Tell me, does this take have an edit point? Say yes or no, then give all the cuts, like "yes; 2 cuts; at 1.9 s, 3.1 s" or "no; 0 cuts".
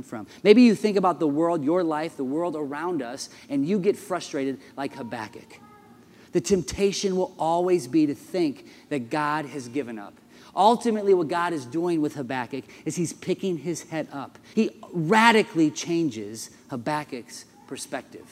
yes; 1 cut; at 14.5 s